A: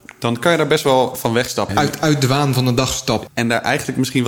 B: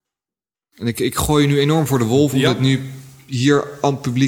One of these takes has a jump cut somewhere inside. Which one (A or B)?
A